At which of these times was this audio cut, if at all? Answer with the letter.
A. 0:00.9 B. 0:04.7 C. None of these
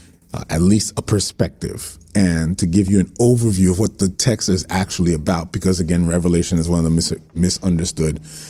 A